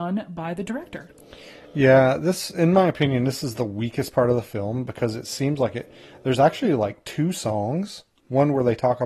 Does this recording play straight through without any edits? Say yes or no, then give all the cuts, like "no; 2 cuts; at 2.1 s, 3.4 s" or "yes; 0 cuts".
yes; 0 cuts